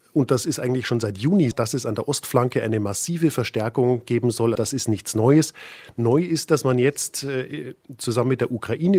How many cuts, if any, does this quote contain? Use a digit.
2